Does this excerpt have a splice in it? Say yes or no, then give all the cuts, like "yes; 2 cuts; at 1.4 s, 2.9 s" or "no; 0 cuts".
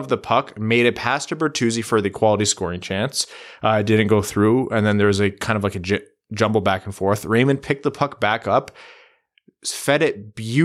no; 0 cuts